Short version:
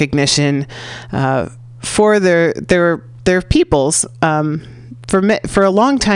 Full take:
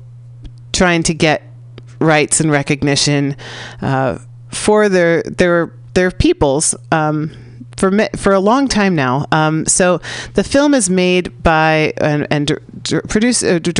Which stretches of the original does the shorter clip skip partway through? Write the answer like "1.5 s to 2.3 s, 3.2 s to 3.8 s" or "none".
none